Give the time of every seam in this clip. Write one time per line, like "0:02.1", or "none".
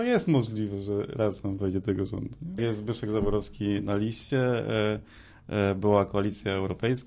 0:02.6